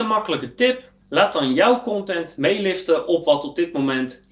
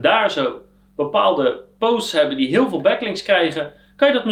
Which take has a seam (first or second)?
first